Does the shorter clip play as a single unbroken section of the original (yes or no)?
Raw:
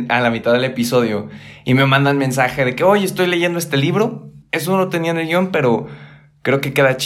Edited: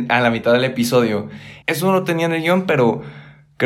no